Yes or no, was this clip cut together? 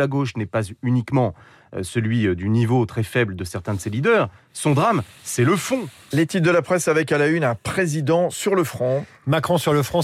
yes